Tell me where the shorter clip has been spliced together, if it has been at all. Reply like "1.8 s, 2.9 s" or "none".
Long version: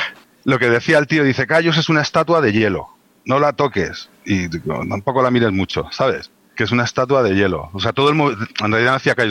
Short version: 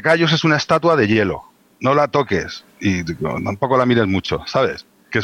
none

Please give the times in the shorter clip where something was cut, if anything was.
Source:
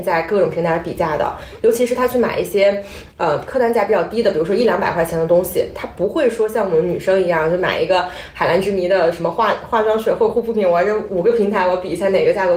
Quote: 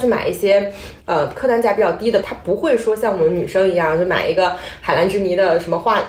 2.2 s

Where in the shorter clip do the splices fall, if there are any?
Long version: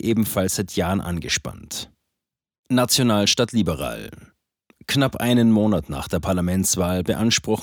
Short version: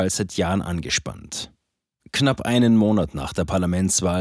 2.0 s

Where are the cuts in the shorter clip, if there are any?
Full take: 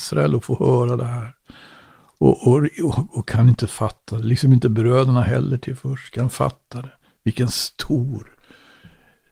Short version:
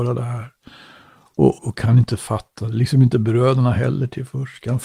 1.6 s

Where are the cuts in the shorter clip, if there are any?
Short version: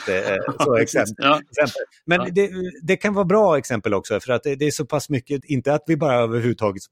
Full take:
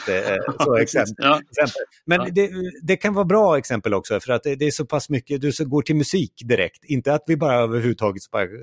5.4 s

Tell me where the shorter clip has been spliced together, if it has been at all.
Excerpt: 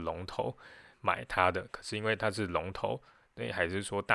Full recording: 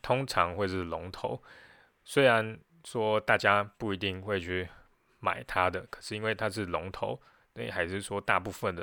0.9 s

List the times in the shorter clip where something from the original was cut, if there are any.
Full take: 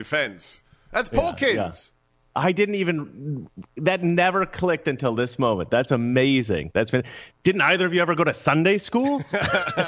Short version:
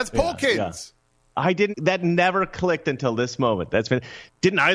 1.7 s, 3.7 s

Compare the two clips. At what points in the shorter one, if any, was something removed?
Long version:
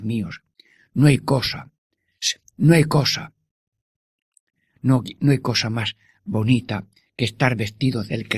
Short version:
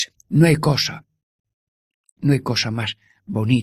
2.2 s

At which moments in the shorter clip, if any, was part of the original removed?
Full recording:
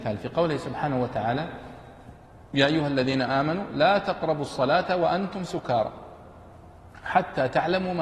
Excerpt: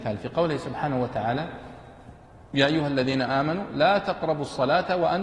none

